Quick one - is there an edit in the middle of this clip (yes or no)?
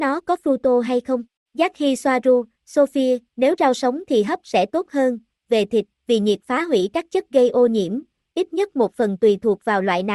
yes